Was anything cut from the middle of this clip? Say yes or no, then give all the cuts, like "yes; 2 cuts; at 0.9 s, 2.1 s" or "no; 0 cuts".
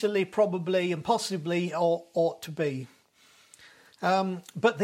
no; 0 cuts